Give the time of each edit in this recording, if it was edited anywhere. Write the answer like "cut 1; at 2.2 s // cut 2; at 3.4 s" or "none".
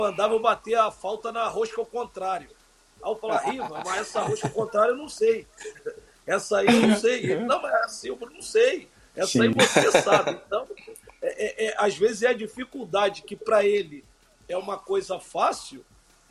none